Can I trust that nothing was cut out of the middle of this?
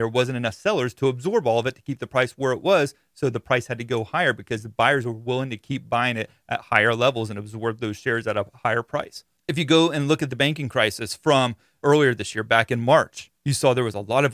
no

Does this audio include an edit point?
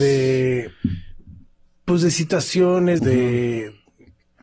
yes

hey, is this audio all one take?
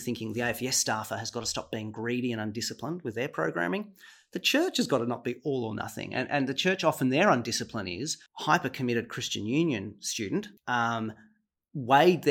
no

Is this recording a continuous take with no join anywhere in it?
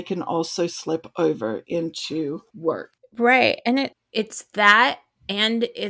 yes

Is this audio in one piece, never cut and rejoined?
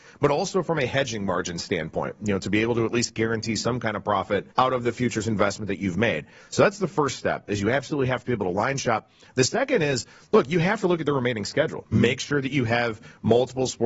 no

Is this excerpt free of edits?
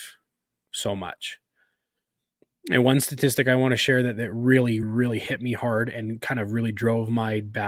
no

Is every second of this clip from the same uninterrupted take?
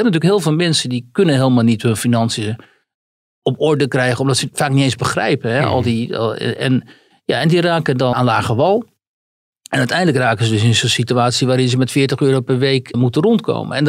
no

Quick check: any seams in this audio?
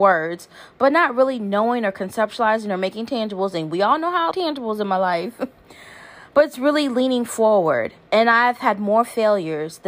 yes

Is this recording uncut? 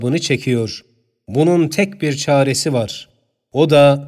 yes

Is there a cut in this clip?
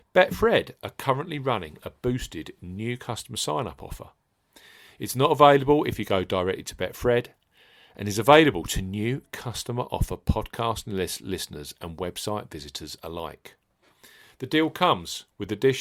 no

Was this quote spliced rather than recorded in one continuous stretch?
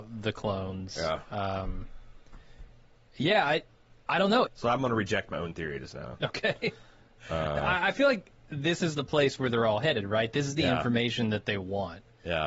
yes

